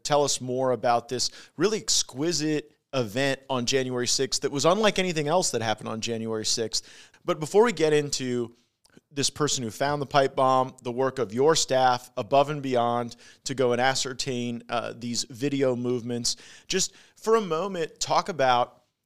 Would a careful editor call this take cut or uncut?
cut